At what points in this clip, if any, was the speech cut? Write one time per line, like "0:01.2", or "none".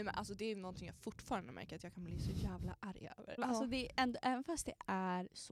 0:03.4

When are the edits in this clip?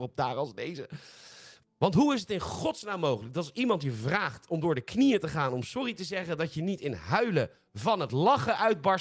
none

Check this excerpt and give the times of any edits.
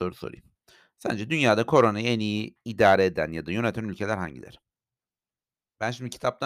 none

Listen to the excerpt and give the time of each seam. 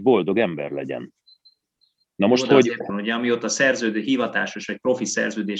0:02.9

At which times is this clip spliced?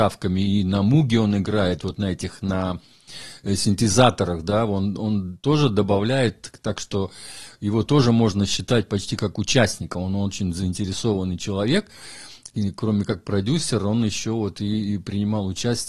none

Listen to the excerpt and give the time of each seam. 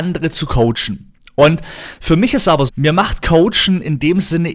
0:02.7

